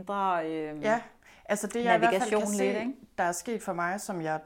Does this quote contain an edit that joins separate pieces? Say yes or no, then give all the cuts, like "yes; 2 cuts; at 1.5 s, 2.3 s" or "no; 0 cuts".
no; 0 cuts